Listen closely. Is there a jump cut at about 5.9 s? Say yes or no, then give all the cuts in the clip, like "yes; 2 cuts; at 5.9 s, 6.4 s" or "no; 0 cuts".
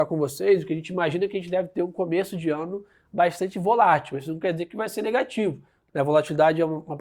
yes; 1 cut; at 5.9 s